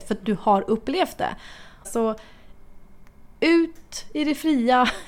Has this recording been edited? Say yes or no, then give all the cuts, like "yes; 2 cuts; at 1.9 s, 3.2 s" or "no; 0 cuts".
yes; 1 cut; at 1.8 s